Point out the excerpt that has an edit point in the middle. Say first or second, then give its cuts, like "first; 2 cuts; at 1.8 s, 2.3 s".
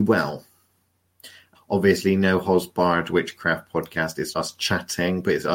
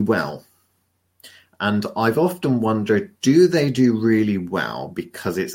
first; 2 cuts; at 1.5 s, 4.3 s